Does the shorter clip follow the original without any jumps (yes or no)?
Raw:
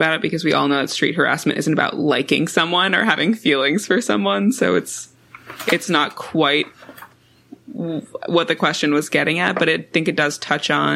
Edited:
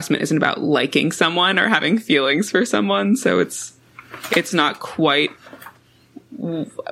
yes